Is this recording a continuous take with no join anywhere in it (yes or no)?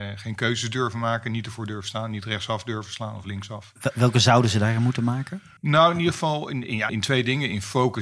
no